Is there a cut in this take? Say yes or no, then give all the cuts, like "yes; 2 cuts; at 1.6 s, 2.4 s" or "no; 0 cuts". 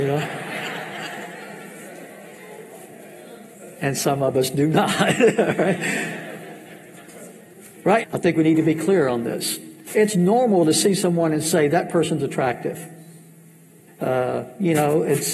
yes; 3 cuts; at 8.0 s, 9.9 s, 13.9 s